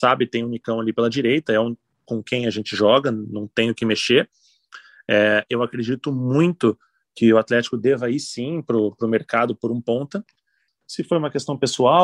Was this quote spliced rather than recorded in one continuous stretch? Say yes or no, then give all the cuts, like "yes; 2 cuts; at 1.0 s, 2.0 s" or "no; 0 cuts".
yes; 1 cut; at 10.7 s